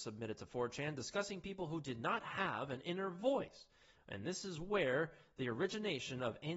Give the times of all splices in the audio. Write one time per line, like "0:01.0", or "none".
none